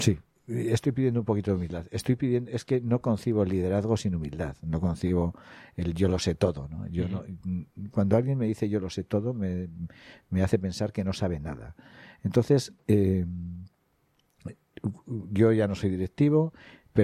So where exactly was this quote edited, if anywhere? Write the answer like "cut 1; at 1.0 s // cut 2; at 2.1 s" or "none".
none